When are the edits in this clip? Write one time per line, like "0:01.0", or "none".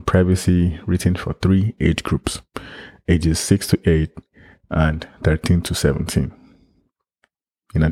0:04.6

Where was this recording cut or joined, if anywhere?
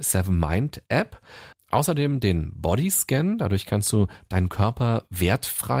0:01.5

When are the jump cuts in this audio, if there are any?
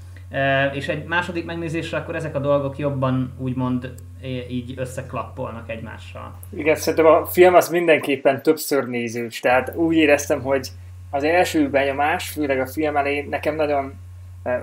none

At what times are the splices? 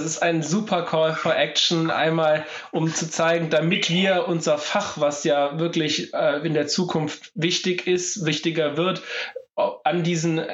none

